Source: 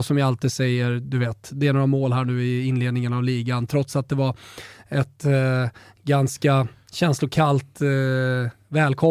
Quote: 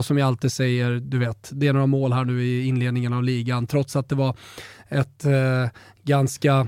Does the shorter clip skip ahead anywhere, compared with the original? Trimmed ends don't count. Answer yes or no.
no